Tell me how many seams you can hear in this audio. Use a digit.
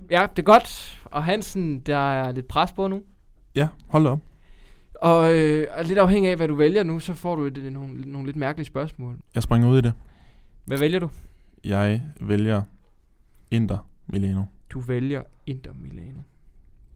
1